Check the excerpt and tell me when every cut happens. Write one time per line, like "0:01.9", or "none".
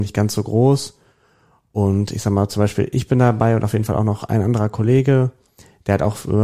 none